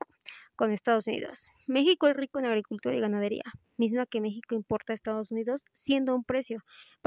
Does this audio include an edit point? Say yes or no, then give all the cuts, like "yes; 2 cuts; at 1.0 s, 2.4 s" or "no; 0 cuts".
no; 0 cuts